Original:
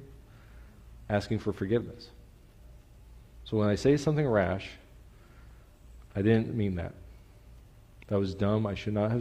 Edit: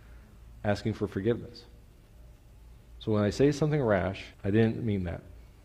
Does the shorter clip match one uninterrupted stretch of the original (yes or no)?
no